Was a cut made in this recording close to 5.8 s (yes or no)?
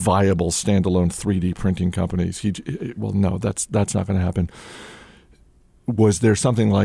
no